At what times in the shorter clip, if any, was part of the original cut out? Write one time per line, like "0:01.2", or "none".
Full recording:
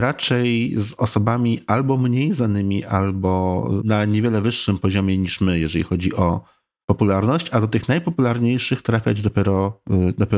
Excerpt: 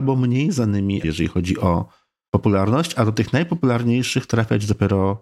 0:01.0